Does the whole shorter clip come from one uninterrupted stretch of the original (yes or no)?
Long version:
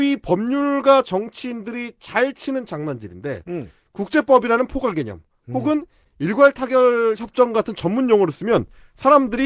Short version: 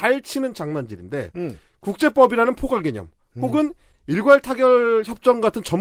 yes